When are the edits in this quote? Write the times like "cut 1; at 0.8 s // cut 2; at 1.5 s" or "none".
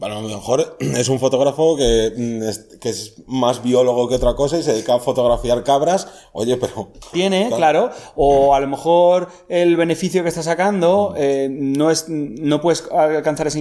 cut 1; at 7.1 s